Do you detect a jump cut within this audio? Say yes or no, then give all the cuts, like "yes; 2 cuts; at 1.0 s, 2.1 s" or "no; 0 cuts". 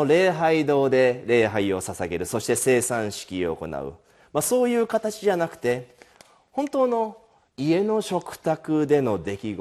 no; 0 cuts